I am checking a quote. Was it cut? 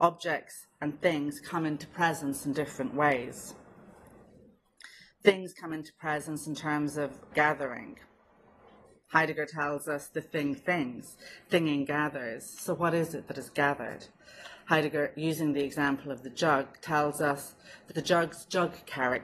yes; 2 cuts; at 7.3 s, 17.9 s

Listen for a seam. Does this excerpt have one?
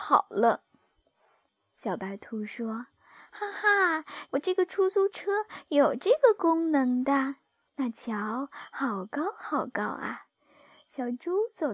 yes; 2 cuts; at 4.3 s, 7.7 s

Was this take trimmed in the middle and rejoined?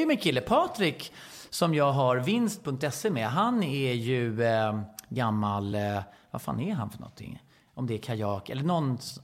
no; 0 cuts

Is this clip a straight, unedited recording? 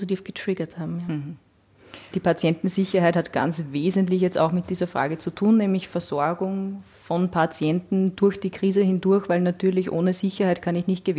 yes; 0 cuts

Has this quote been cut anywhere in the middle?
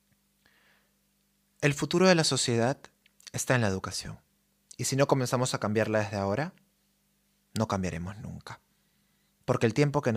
no; 0 cuts

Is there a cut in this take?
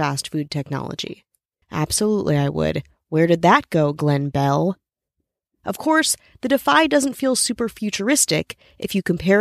yes; 1 cut; at 1.6 s

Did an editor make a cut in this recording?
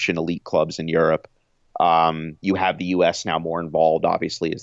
no; 0 cuts

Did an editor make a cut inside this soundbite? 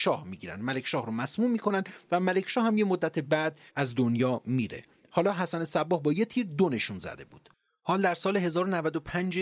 yes; 1 cut; at 3.7 s

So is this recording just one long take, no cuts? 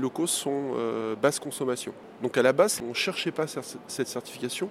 no; 1 cut; at 2.2 s

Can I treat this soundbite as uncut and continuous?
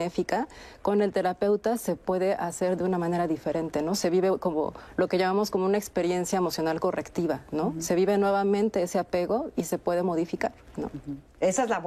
yes; 0 cuts

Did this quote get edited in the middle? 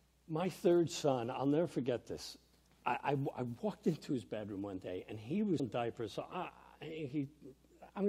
yes; 1 cut; at 5.6 s

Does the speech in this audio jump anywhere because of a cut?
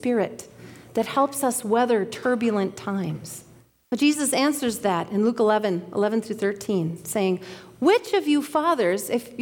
yes; 1 cut; at 3.8 s

